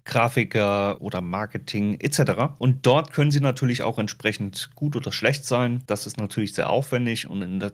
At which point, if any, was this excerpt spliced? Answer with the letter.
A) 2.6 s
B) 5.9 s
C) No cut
B